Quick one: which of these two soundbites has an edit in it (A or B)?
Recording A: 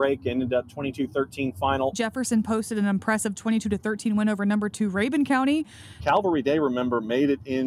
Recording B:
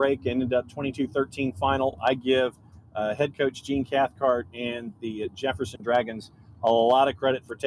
A